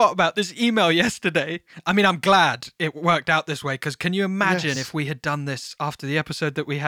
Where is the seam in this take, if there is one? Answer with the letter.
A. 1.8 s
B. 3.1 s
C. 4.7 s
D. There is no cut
D